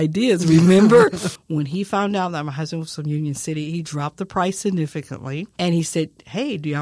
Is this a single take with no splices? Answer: no; 2 cuts; at 1.4 s, 5.6 s

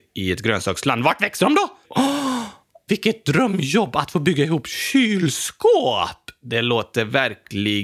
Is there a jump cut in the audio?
yes; 2 cuts; at 1.8 s, 2.9 s

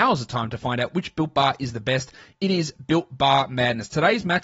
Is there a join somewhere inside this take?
no; 0 cuts

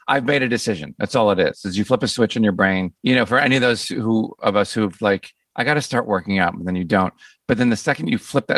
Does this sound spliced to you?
yes; 1 cut; at 3.0 s

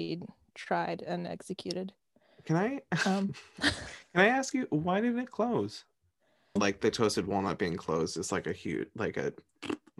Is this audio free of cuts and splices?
no; 1 cut; at 6.6 s

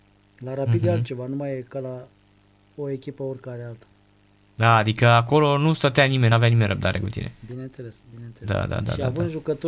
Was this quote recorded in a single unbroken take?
yes; 0 cuts

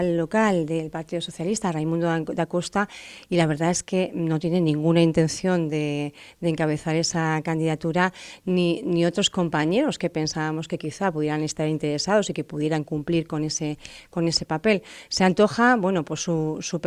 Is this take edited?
no; 0 cuts

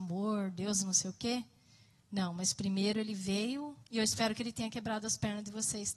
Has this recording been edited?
yes; 1 cut; at 3.8 s

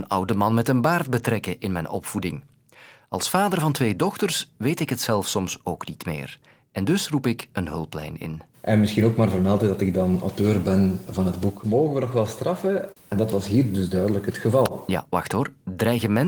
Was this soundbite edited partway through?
yes; 2 cuts; at 8.5 s, 13.0 s

